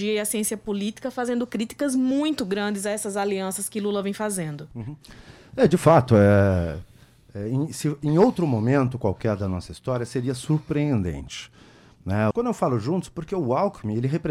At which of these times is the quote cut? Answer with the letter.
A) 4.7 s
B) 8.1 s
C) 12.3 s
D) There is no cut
C